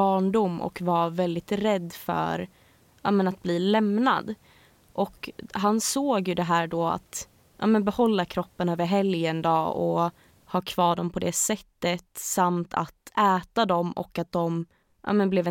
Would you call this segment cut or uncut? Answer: uncut